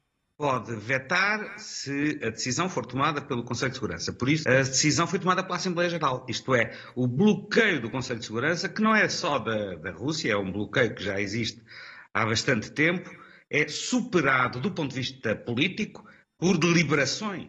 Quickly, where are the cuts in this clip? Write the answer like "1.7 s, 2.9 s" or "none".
4.4 s